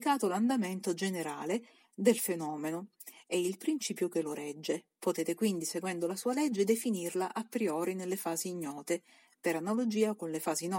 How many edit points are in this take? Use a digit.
0